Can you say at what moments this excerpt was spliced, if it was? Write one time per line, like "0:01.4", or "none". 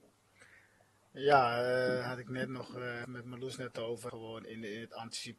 0:03.0
0:04.1